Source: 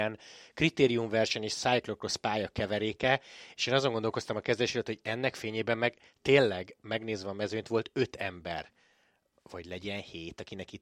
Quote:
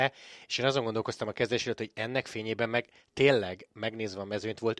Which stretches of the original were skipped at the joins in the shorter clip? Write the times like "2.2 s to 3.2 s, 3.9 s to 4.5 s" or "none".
none